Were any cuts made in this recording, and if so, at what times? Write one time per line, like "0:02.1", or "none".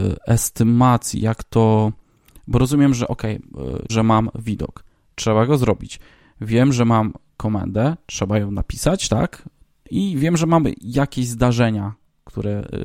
0:03.9